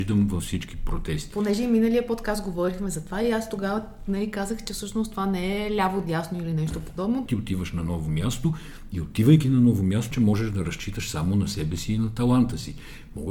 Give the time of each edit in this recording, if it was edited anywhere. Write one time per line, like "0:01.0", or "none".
0:07.3
0:10.1